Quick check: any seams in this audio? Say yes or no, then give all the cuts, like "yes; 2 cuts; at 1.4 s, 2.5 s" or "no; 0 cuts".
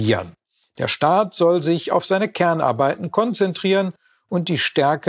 no; 0 cuts